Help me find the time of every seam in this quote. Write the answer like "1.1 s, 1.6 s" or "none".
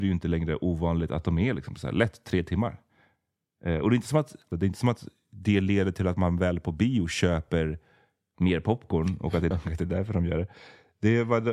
4.5 s, 9.5 s